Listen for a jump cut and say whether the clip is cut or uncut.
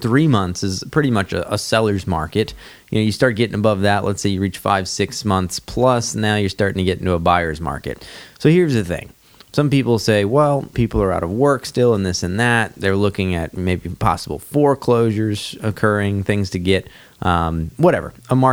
cut